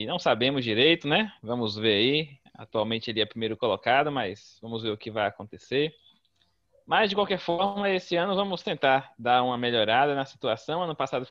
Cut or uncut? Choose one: uncut